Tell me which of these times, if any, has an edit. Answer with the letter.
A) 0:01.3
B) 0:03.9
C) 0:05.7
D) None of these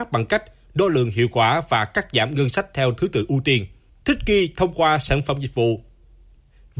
B